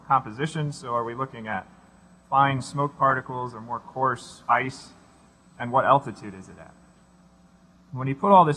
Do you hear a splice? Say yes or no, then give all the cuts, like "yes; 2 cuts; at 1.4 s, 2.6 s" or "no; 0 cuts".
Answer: no; 0 cuts